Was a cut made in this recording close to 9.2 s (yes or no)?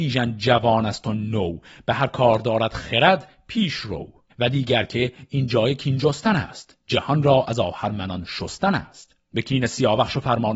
yes